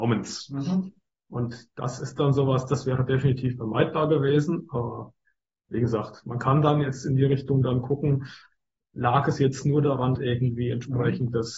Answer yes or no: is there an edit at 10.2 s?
yes